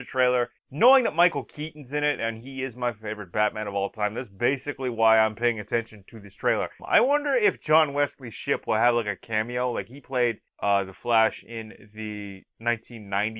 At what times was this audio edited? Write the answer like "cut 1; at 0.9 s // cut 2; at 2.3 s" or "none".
cut 1; at 6.8 s